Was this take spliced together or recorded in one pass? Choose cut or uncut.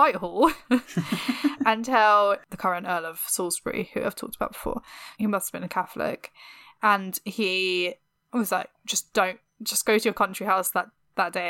cut